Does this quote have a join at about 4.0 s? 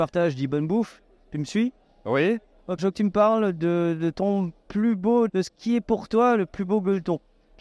no; 2 cuts; at 2.8 s, 5.3 s

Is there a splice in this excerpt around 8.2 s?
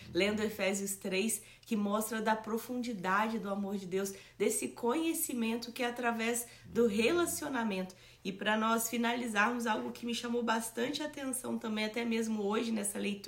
yes; 1 cut; at 8.2 s

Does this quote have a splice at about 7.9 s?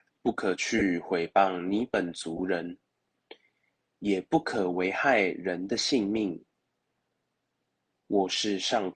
no; 0 cuts

